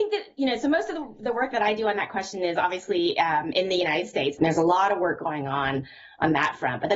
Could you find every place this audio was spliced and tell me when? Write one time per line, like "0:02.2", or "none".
0:04.4